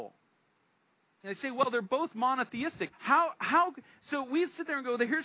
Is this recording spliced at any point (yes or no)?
yes